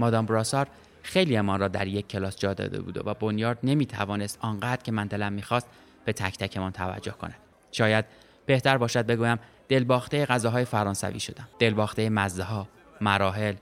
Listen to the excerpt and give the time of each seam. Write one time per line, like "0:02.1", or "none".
0:07.5
0:11.5